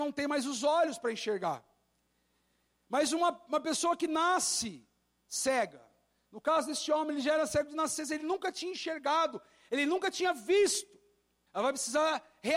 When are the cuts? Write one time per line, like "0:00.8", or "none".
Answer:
0:11.5